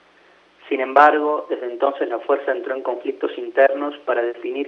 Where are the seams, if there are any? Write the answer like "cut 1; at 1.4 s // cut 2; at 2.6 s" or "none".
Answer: none